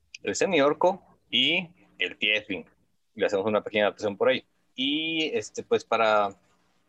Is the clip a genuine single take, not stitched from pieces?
no; 2 cuts; at 2.9 s, 4.7 s

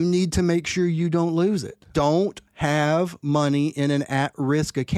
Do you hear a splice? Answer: yes; 1 cut; at 1.9 s

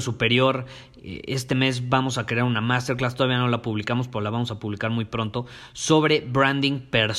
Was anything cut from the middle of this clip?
no; 0 cuts

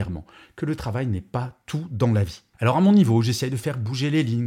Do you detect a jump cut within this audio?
no; 0 cuts

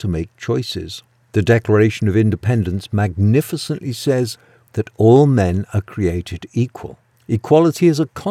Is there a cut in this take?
yes; 3 cuts; at 1.2 s, 4.7 s, 7.1 s

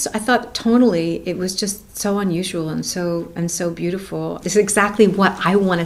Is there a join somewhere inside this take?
yes; 1 cut; at 4.4 s

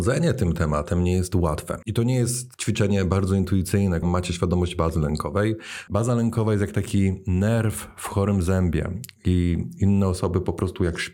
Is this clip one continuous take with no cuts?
no; 3 cuts; at 1.8 s, 4.0 s, 5.9 s

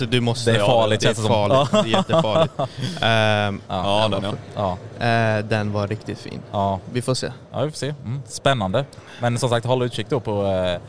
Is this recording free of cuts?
no; 1 cut; at 3.7 s

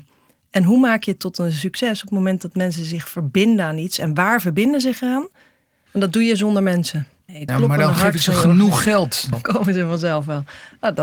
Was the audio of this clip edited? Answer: yes; 3 cuts; at 5.9 s, 7.5 s, 9.3 s

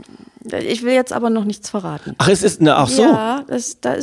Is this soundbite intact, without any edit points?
yes; 0 cuts

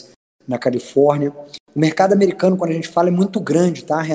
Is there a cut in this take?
no; 0 cuts

